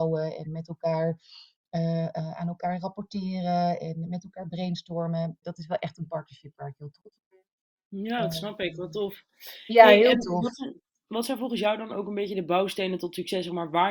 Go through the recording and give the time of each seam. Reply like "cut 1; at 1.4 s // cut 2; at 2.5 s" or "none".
cut 1; at 5.4 s